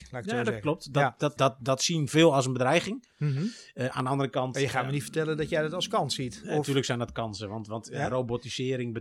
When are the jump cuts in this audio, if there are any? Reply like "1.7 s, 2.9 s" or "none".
1.4 s